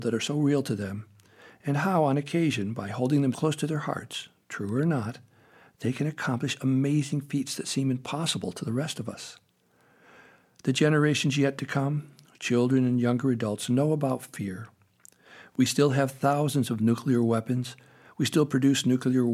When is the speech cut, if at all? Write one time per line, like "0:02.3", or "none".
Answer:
0:03.3

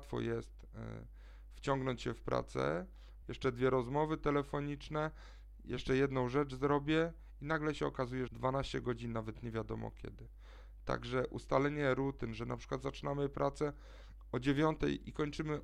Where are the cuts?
0:03.2
0:08.3

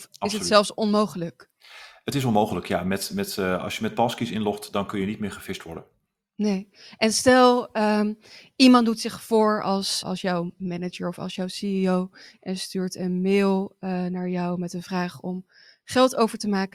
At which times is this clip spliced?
0:10.0

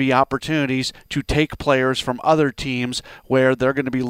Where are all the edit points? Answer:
none

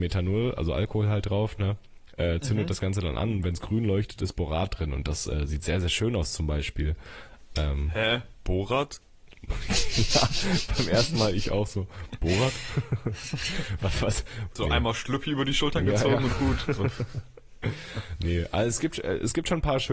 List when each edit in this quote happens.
0:14.5

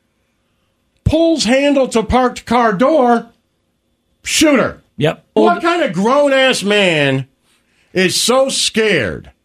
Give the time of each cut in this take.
0:05.4

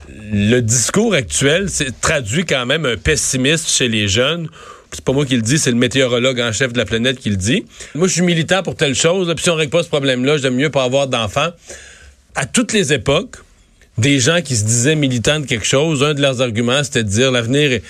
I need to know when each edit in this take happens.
0:04.9
0:07.9
0:12.3

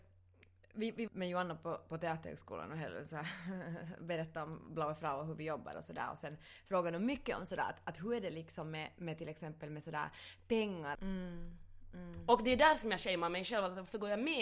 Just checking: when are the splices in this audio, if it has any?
0:01.1
0:10.9

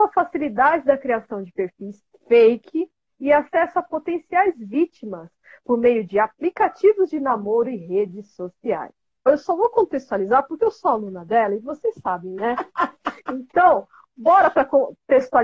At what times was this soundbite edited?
0:09.3
0:12.4

